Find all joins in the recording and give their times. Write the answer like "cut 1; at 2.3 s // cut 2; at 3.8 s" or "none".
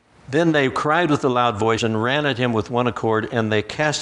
cut 1; at 1.8 s